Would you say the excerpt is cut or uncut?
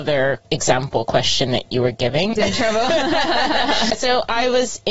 cut